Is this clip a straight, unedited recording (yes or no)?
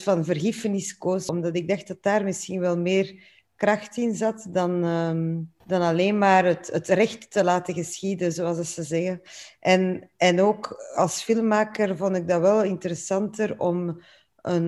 no